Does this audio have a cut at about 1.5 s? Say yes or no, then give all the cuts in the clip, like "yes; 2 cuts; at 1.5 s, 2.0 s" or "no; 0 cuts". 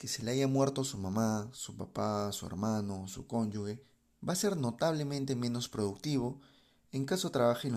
no; 0 cuts